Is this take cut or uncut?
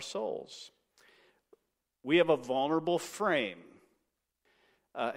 uncut